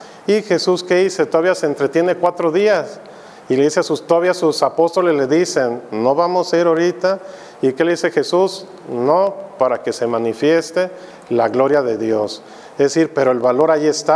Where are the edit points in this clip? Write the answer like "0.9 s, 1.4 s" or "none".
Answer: none